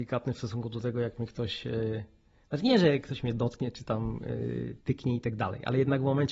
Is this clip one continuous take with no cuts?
yes; 0 cuts

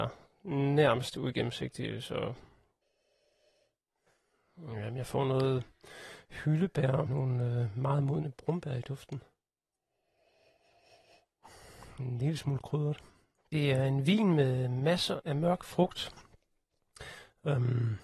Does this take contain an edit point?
yes; 2 cuts; at 7.1 s, 15.2 s

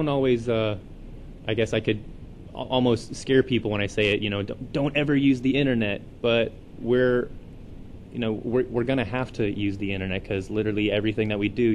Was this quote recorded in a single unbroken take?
yes; 0 cuts

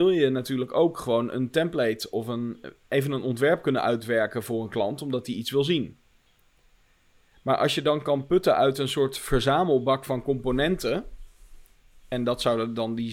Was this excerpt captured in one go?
yes; 0 cuts

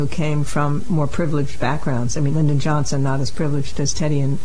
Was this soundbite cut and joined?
yes; 1 cut; at 2.3 s

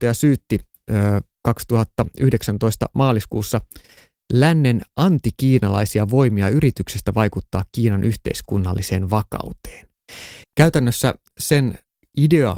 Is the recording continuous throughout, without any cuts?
no; 1 cut; at 10.4 s

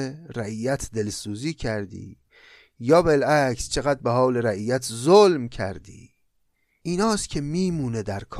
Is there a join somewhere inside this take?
no; 0 cuts

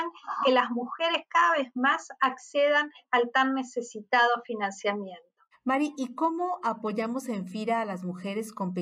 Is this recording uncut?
yes; 0 cuts

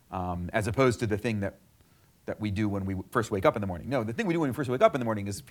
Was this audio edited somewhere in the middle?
no; 0 cuts

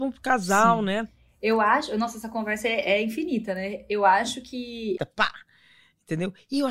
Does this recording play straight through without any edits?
no; 1 cut; at 5.0 s

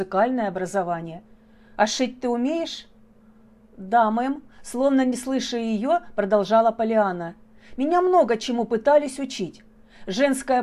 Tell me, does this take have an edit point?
no; 0 cuts

